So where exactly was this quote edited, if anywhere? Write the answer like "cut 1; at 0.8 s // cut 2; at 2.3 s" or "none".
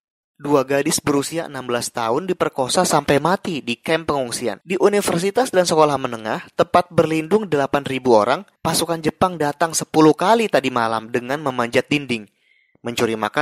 cut 1; at 4.6 s // cut 2; at 8.6 s